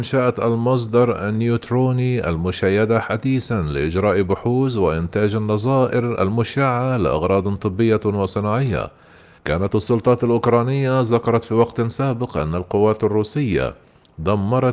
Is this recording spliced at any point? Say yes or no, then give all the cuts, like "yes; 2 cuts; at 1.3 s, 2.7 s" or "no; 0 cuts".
yes; 1 cut; at 9.4 s